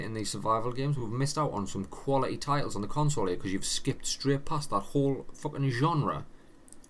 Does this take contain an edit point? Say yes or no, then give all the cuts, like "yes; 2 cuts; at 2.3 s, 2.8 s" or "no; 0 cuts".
no; 0 cuts